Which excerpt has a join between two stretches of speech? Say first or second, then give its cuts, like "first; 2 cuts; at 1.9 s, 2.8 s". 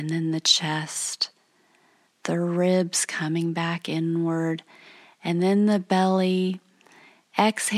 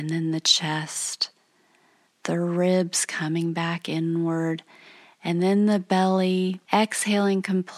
second; 1 cut; at 6.7 s